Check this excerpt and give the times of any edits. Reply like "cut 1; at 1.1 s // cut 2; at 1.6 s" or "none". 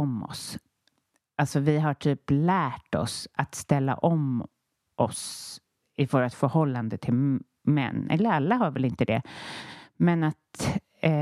none